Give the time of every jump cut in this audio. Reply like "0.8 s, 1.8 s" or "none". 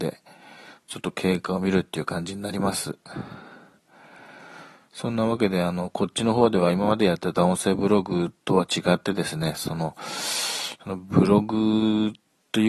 none